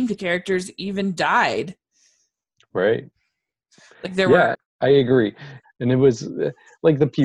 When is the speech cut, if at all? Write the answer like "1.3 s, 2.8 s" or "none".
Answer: 4.5 s, 5.6 s